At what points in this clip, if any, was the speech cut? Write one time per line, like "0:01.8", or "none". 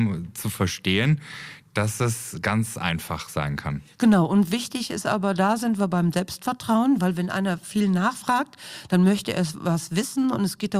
none

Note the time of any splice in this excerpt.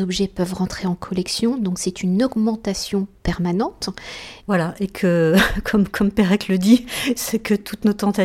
0:04.4

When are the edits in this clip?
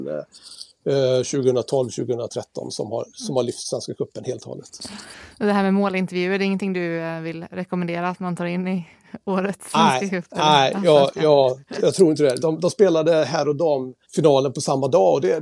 0:12.4
0:14.0

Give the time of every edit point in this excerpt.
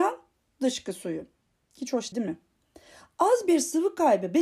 0:02.1

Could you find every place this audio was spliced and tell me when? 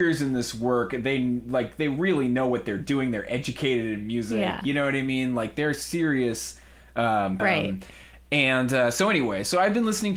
0:07.4

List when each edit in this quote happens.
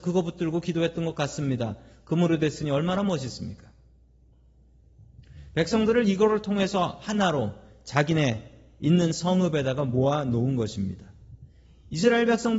none

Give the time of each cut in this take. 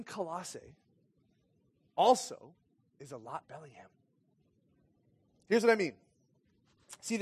0:03.4

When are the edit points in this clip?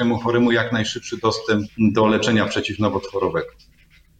0:01.7

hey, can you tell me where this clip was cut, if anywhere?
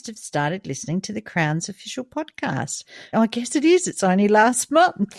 0:03.1

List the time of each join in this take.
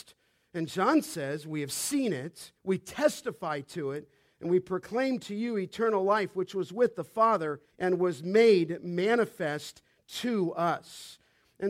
0:02.6
0:07.7

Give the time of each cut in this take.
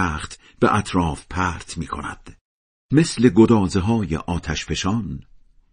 none

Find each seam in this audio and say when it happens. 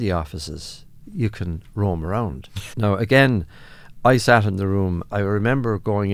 0:02.7
0:05.1

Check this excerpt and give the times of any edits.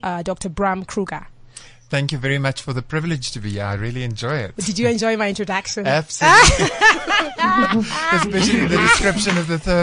none

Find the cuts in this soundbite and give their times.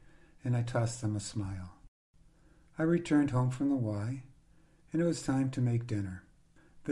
none

